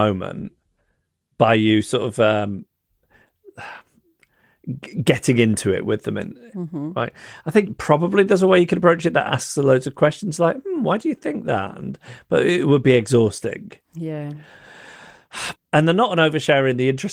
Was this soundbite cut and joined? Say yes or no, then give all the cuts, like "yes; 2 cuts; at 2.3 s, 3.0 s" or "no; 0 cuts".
yes; 2 cuts; at 6.5 s, 15.5 s